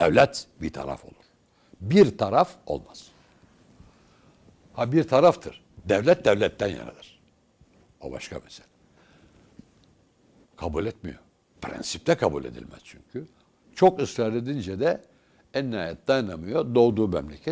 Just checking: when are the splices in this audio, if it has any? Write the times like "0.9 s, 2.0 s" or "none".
10.5 s